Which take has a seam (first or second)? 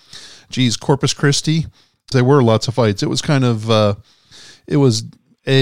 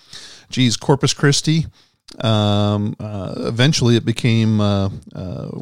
first